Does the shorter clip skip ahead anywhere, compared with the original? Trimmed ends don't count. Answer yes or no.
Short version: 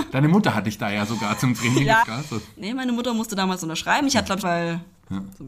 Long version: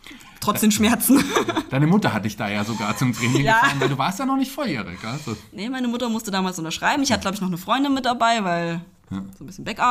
yes